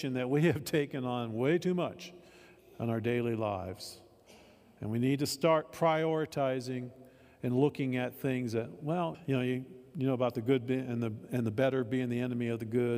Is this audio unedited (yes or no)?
no